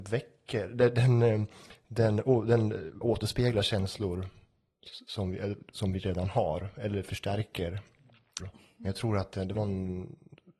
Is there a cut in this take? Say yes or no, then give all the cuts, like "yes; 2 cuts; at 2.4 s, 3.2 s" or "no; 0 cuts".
yes; 3 cuts; at 3.0 s, 8.4 s, 9.5 s